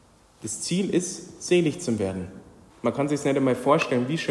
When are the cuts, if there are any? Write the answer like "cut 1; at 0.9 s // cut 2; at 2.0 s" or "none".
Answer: cut 1; at 2.7 s